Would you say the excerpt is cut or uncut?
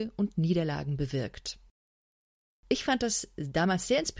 uncut